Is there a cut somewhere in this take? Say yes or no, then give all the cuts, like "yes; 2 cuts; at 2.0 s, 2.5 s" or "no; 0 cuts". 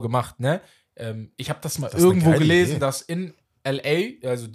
no; 0 cuts